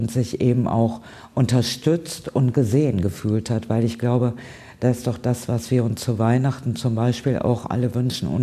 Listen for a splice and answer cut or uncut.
uncut